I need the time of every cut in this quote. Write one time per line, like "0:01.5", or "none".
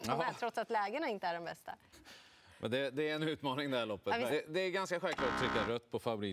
0:01.9
0:04.3